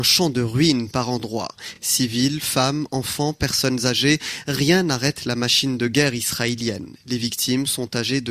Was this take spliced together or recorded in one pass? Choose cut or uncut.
uncut